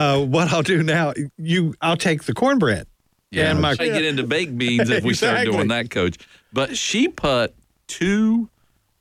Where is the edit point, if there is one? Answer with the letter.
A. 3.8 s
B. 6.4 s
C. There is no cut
A